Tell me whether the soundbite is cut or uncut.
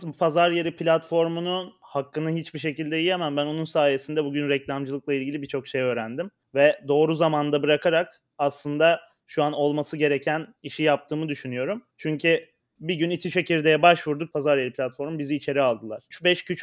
cut